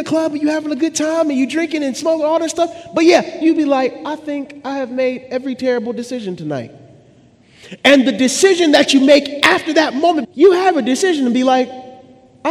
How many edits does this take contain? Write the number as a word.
two